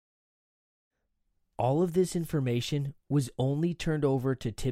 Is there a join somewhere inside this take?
yes; 1 cut; at 3.0 s

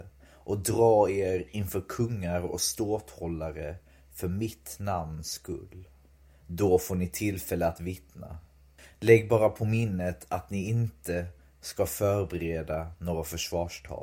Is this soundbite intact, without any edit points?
yes; 0 cuts

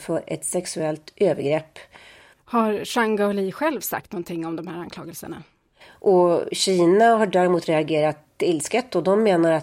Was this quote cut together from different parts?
yes; 2 cuts; at 2.3 s, 5.8 s

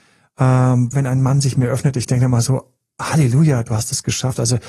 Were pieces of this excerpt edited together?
yes; 1 cut; at 0.9 s

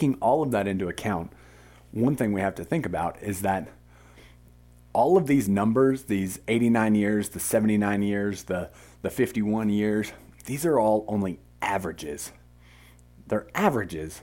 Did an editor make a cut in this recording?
no; 0 cuts

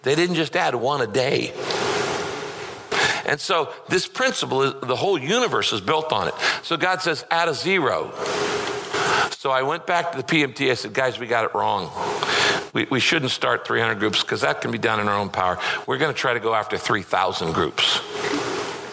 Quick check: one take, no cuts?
yes; 0 cuts

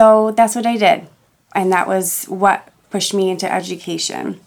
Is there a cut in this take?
no; 0 cuts

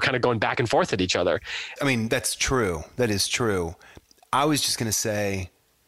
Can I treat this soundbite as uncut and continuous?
no; 1 cut; at 1.8 s

